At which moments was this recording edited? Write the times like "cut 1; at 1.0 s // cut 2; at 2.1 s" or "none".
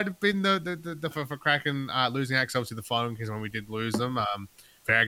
cut 1; at 1.1 s